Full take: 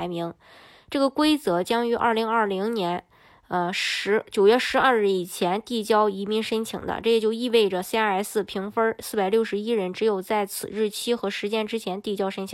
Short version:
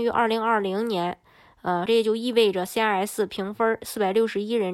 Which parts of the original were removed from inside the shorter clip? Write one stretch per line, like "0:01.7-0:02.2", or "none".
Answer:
0:03.7-0:07.0